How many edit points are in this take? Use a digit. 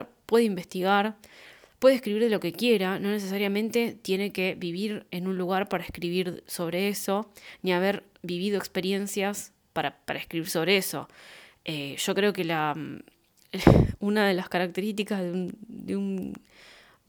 0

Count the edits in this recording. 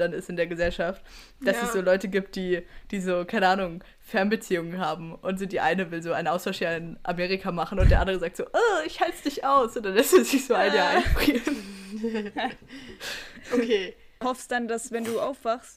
1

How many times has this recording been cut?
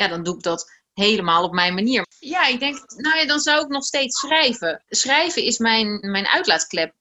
3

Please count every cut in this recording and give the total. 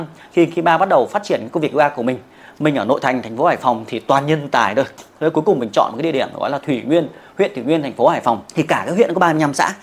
1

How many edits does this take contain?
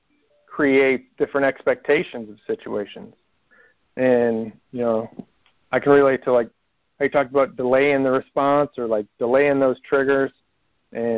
1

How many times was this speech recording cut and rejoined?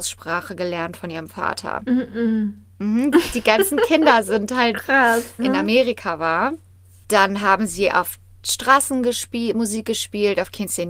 2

